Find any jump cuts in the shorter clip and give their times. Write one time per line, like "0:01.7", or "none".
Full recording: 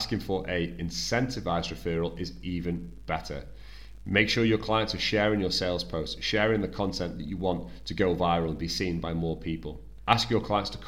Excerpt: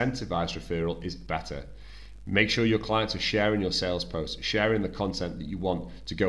0:01.3